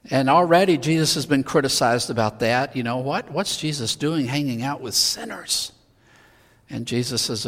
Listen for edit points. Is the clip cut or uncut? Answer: uncut